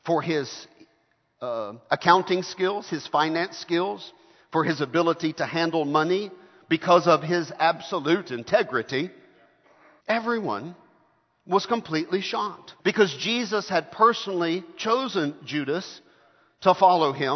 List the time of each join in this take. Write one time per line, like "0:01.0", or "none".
0:10.0
0:12.8

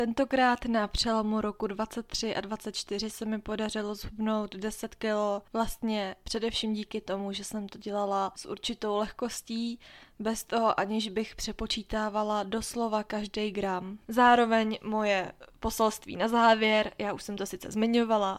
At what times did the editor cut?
0:14.1

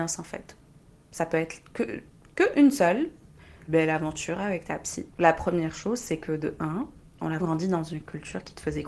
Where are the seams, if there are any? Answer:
0:03.7
0:05.1
0:07.4

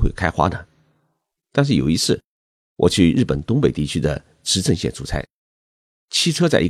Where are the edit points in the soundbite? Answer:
0:01.4

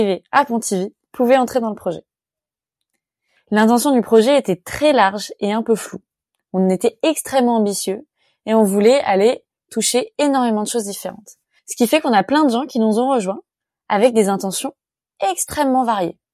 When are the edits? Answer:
none

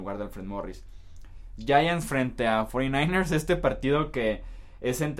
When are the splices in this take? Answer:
none

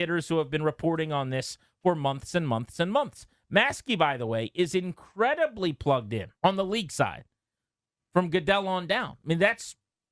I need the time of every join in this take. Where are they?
0:06.4

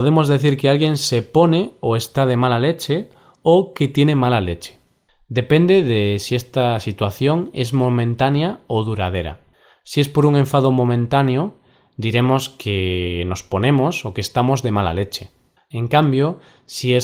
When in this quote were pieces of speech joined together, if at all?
none

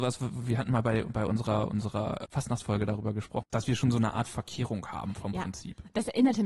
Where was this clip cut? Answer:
0:02.2
0:03.4

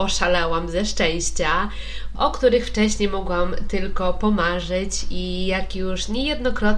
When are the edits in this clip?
0:02.1

